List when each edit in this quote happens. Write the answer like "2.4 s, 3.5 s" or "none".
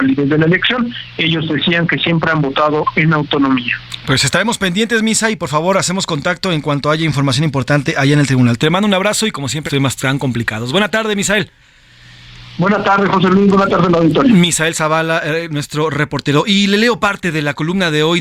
9.7 s